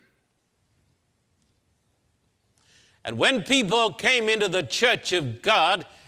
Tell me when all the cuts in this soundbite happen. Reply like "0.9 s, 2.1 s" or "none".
none